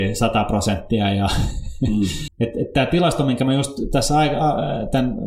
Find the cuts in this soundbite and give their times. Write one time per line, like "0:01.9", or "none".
0:02.3

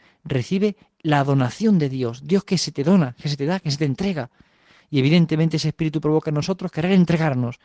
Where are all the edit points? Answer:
none

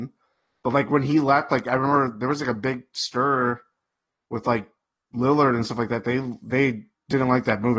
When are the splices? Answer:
none

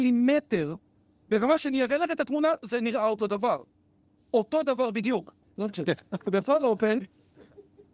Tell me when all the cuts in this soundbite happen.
0:05.4

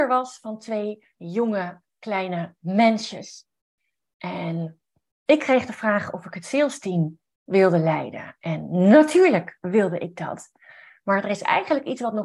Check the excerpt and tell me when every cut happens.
none

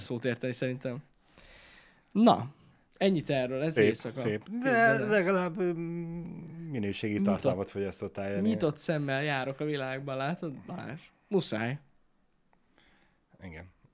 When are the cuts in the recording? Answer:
0:03.8

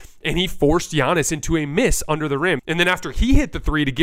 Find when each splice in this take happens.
0:02.6

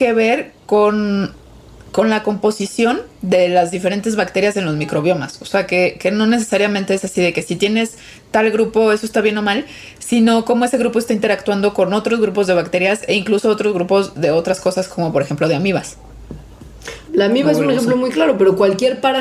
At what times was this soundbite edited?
0:17.1

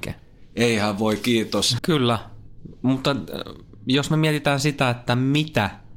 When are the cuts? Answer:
0:01.8

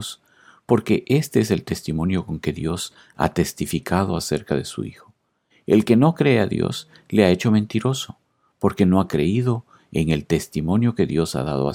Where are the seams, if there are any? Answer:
0:05.5

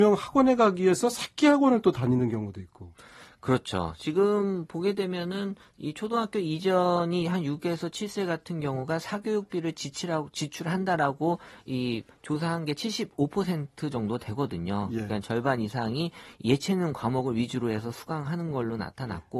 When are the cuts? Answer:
none

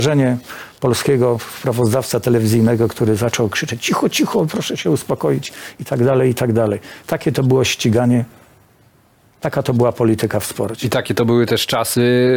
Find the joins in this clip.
none

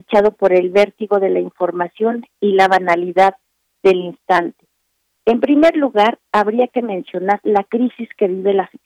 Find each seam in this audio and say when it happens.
none

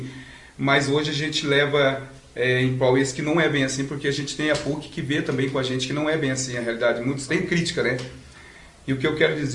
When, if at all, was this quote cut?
0:07.3

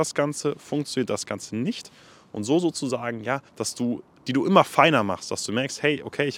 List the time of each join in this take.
0:03.5

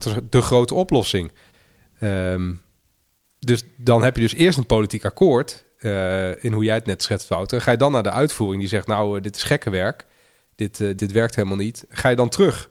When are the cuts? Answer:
0:11.0

